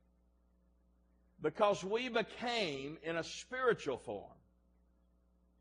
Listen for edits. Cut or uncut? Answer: cut